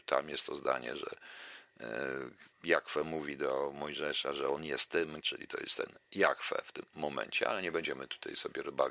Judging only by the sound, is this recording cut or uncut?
cut